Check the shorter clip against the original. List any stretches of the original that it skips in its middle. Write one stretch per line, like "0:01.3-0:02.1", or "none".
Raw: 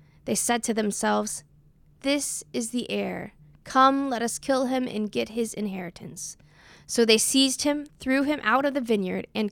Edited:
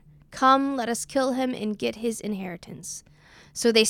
none